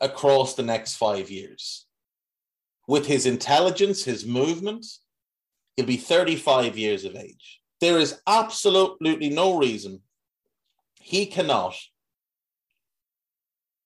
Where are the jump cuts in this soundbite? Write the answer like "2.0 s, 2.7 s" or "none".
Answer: 5.7 s, 7.7 s

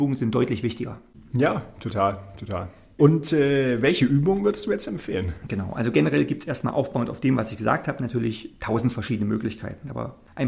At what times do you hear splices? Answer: none

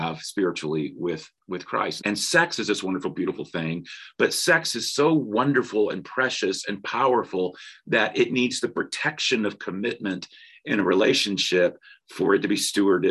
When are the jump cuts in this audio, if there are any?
2.0 s

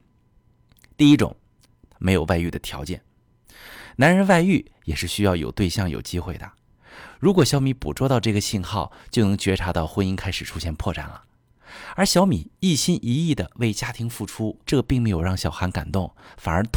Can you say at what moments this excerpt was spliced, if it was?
7.2 s, 14.6 s

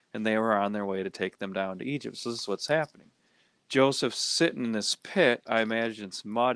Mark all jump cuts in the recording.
none

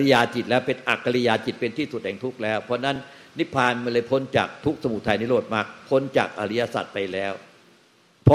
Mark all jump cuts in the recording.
none

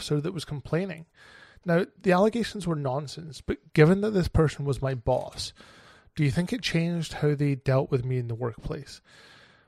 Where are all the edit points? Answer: none

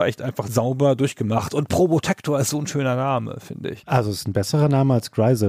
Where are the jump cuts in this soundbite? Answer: 3.8 s

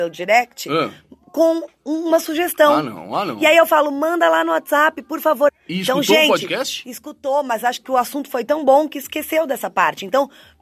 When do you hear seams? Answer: 5.5 s

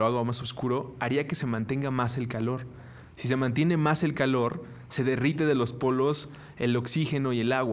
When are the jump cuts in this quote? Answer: none

